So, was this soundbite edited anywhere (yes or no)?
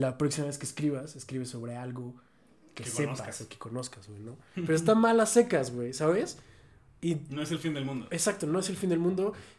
yes